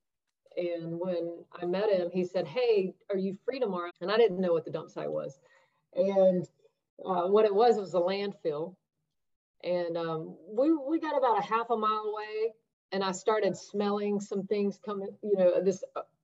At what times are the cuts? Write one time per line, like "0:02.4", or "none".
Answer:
0:03.9